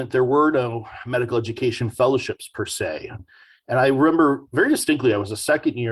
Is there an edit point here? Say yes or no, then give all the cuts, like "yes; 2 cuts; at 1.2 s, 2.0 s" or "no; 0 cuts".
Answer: no; 0 cuts